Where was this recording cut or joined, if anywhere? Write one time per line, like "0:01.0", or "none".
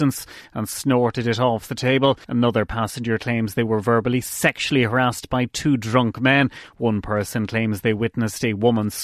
0:02.2